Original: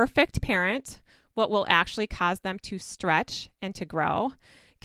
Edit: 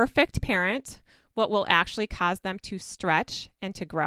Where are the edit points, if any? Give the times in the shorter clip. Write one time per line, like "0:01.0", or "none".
none

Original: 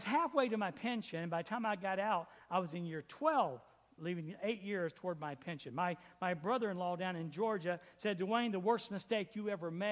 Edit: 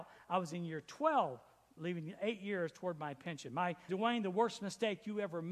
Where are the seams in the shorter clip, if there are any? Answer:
0:03.9

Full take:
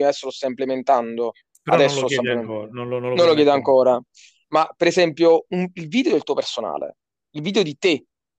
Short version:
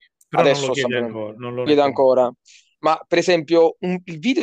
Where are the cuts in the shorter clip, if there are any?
0:01.7

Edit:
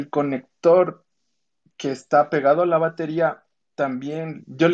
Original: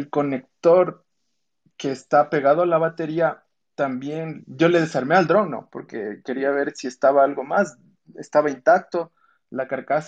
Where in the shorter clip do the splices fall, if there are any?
none

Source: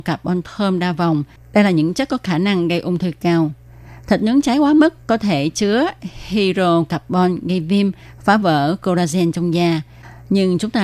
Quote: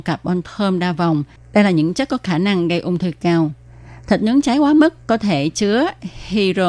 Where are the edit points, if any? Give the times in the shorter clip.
none

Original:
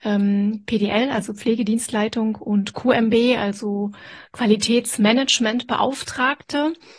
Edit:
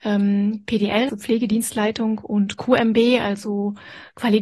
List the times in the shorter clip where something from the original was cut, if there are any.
0:01.1

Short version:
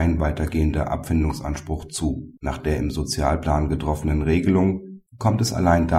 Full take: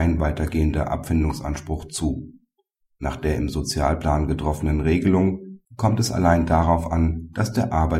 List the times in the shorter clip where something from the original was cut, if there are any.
0:02.4

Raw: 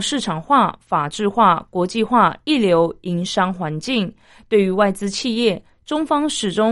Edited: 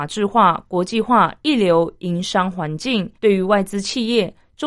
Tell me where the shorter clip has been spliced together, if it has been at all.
0:03.1

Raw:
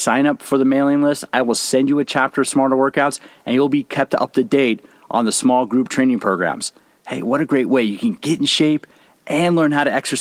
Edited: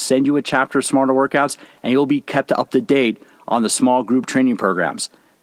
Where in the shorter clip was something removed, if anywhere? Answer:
none

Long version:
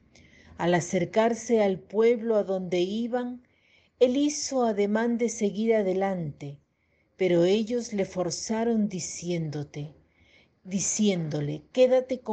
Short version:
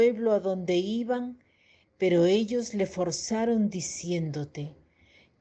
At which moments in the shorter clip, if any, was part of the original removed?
0:01.8

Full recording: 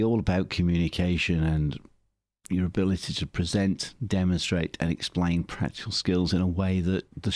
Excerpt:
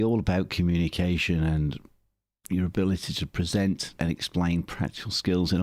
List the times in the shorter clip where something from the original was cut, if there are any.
0:04.0

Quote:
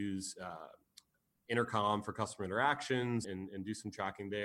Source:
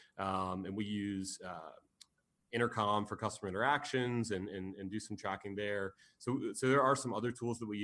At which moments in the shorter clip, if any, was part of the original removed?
0:03.2

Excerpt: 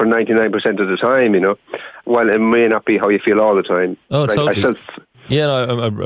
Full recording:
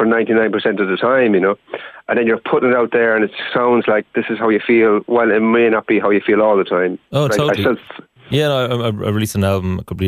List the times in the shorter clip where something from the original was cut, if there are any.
0:02.0

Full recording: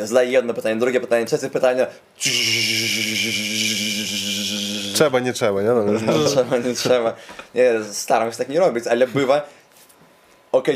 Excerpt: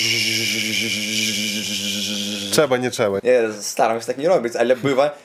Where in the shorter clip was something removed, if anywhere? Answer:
0:03.2

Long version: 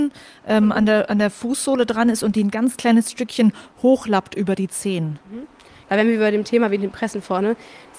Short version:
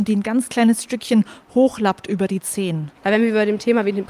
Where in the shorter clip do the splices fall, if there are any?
0:02.9

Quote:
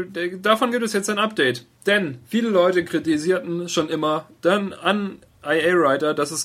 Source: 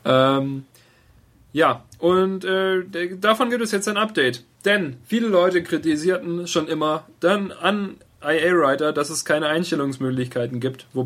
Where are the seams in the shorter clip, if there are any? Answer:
none

